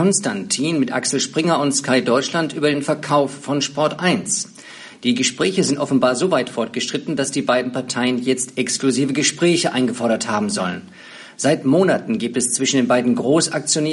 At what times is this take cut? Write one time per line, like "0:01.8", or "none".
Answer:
none